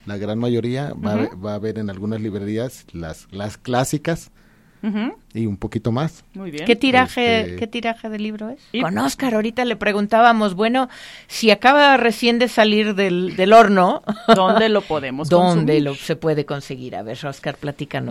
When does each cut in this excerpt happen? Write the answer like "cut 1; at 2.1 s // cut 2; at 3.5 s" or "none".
cut 1; at 8.7 s